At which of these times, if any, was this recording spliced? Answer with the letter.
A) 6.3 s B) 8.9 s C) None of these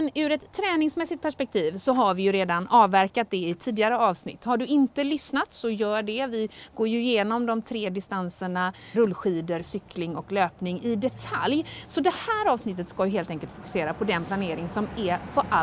B